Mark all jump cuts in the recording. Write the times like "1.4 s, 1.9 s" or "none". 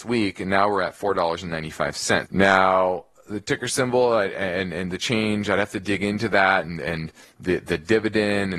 2.3 s